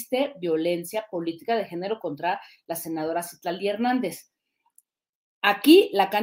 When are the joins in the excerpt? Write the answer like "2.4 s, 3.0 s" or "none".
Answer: none